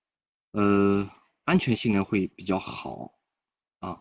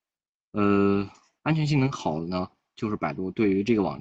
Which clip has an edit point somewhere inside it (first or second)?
second